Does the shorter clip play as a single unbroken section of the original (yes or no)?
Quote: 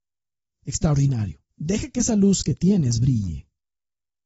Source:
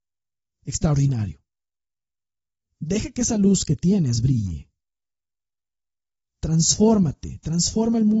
no